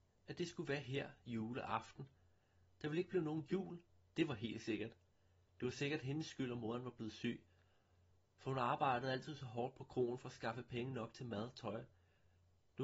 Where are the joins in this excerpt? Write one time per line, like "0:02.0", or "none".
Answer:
0:05.4